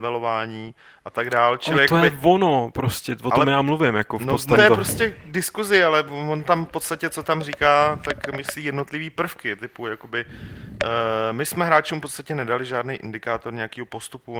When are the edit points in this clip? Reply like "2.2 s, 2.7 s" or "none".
4.6 s